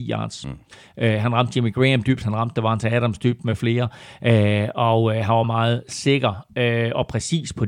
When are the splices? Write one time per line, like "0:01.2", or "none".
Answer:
0:05.4